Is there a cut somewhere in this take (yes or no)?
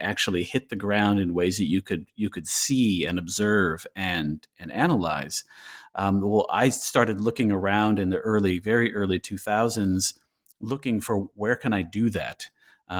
no